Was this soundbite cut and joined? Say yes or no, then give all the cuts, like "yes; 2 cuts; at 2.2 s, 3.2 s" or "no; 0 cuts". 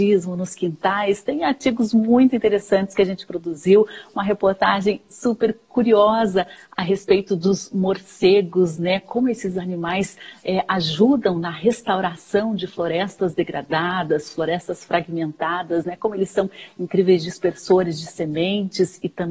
no; 0 cuts